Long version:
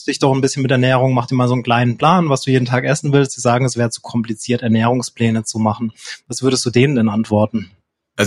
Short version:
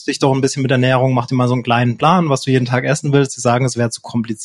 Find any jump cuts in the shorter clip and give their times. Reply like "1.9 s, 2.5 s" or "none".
none